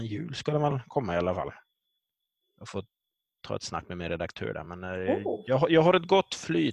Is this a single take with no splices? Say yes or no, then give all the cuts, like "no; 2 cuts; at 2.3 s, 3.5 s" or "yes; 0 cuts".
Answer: yes; 0 cuts